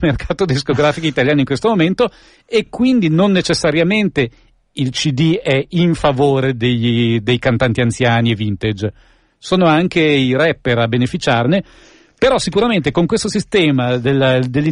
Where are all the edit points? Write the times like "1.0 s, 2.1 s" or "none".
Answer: none